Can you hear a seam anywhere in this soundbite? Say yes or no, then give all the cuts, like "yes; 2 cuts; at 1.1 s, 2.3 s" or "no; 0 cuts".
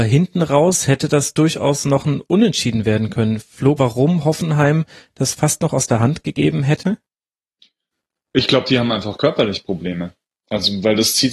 yes; 1 cut; at 3.8 s